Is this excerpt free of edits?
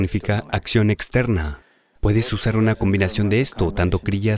yes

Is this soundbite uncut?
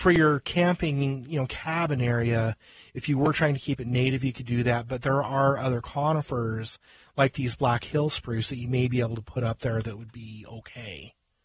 yes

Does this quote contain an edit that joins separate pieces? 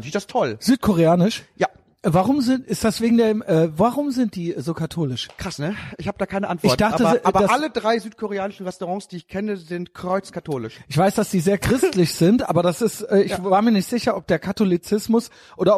no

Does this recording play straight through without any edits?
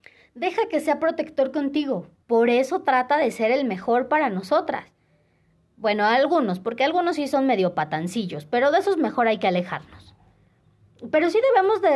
no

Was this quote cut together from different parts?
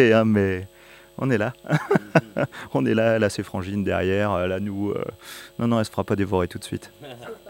no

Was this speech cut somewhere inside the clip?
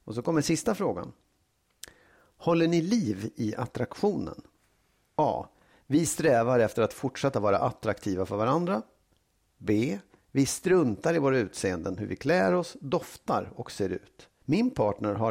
yes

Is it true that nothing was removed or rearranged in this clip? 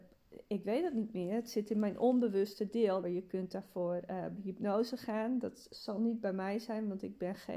no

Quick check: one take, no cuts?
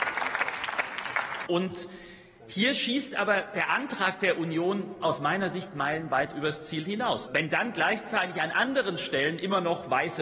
no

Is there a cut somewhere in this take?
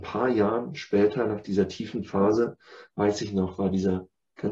no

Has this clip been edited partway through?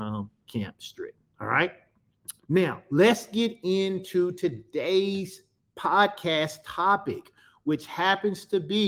yes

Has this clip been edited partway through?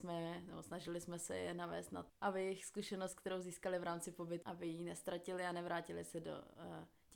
yes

